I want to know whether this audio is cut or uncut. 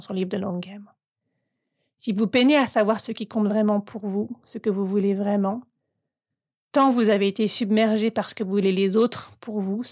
uncut